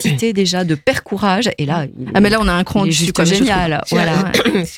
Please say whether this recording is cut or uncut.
uncut